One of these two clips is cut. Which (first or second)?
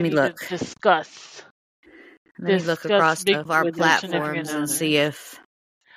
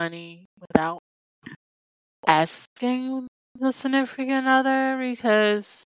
first